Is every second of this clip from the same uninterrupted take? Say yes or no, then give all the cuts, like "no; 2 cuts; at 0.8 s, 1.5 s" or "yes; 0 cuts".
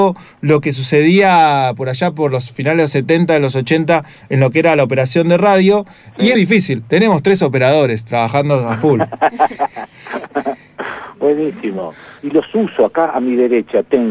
no; 2 cuts; at 6.3 s, 12.2 s